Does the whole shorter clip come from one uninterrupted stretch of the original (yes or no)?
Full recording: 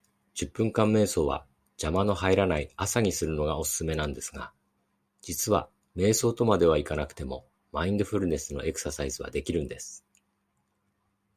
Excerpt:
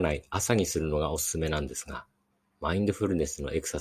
no